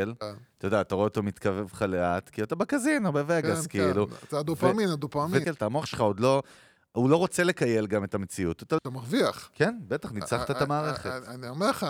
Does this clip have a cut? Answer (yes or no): yes